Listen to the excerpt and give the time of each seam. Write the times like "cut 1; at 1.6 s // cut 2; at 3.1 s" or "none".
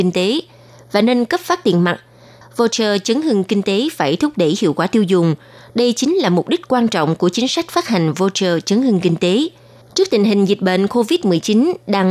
cut 1; at 2.4 s // cut 2; at 9.8 s